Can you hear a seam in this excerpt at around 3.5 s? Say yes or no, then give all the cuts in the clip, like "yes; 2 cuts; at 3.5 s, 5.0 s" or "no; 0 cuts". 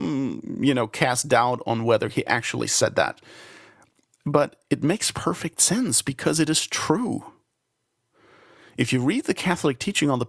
no; 0 cuts